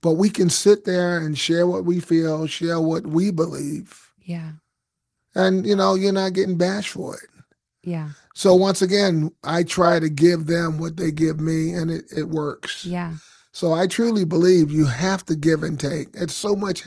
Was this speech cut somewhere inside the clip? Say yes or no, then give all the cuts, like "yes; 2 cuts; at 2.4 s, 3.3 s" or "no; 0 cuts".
no; 0 cuts